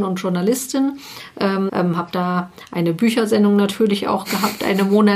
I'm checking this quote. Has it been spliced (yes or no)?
yes